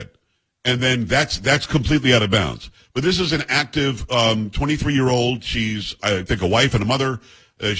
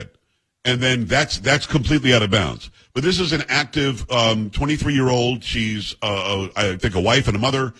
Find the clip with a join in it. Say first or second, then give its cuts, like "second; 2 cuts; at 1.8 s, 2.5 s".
first; 1 cut; at 6.0 s